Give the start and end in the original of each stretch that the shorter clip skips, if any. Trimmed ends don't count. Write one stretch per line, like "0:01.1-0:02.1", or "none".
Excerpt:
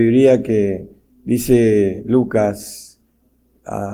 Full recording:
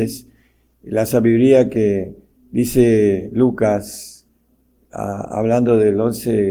none